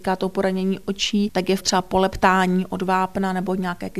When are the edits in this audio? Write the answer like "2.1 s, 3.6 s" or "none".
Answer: none